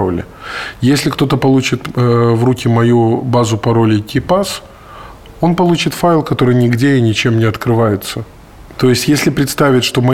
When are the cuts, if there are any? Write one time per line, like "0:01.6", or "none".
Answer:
0:08.7